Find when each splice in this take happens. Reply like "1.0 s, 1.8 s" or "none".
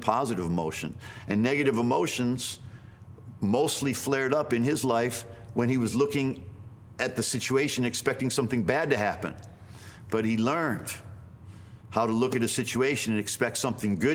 none

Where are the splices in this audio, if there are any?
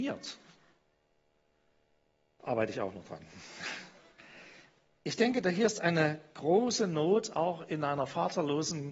none

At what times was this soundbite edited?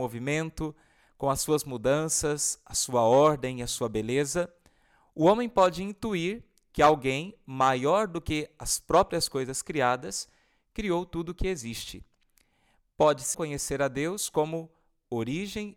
13.3 s

